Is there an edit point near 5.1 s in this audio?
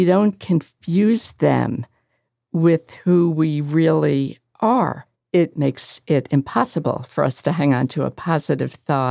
yes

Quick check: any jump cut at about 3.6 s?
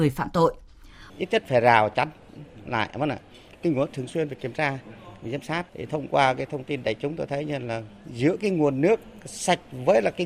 no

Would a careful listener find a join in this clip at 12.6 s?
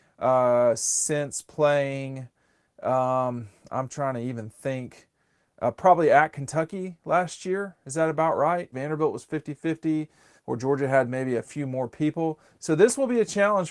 no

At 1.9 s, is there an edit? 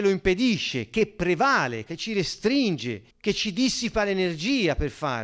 yes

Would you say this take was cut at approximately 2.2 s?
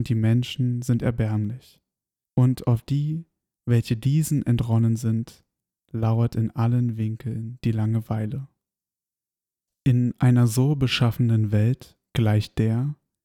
yes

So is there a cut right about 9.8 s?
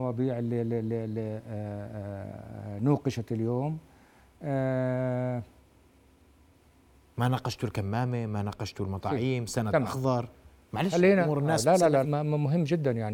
no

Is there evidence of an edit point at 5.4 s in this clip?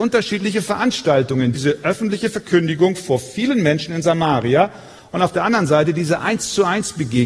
no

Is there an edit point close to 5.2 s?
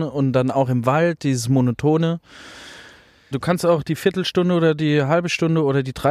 no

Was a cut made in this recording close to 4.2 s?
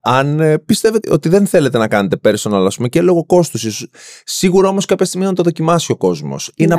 no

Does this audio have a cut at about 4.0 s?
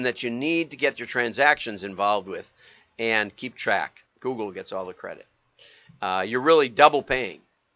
yes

